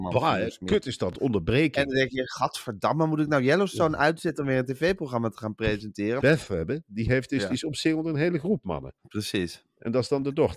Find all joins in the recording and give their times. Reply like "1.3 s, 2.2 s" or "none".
6.2 s, 9.0 s